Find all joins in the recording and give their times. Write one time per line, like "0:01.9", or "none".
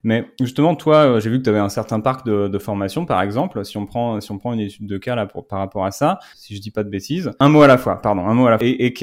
0:06.3